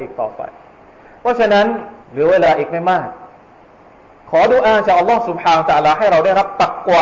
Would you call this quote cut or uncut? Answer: cut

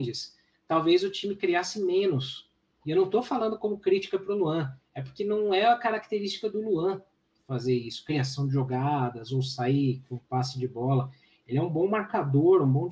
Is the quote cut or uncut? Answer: uncut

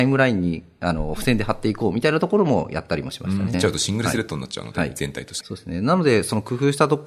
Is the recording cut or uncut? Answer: cut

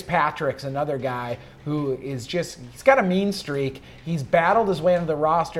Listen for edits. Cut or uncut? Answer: uncut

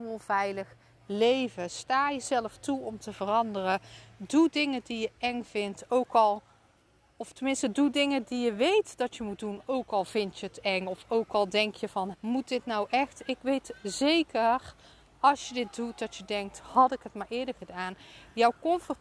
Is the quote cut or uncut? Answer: cut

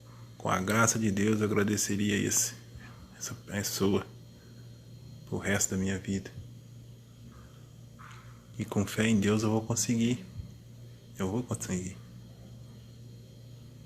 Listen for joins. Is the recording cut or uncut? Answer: uncut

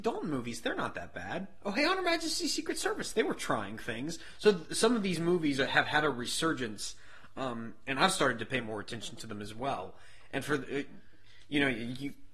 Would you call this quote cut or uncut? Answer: uncut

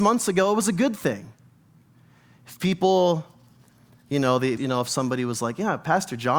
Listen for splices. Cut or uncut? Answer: cut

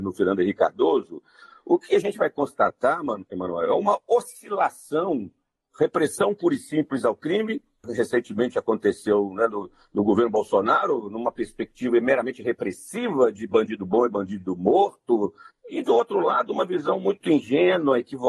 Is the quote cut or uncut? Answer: uncut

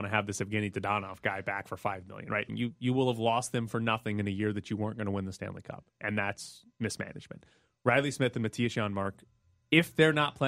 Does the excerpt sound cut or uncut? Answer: cut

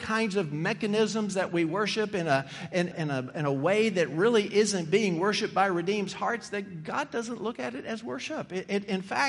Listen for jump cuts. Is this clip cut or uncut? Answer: cut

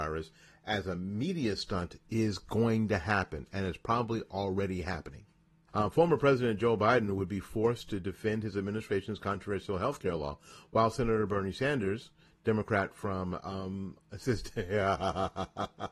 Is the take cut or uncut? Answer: cut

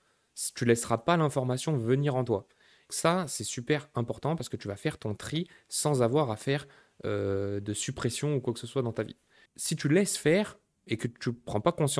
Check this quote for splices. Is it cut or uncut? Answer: cut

